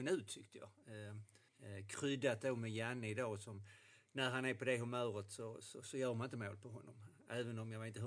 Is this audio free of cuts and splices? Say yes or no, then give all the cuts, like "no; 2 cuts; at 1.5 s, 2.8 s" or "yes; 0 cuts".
no; 1 cut; at 1.5 s